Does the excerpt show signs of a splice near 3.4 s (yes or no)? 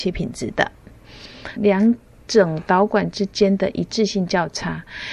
no